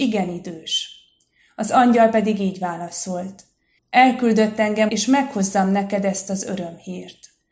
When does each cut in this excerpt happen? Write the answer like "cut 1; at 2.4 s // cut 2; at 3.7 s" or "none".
cut 1; at 3.8 s // cut 2; at 4.9 s